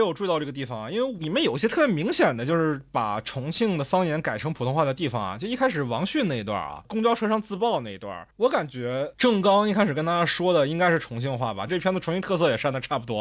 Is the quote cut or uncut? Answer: cut